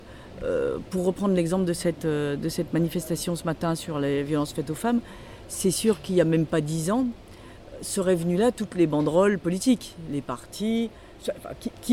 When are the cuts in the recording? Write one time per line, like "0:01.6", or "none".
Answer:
none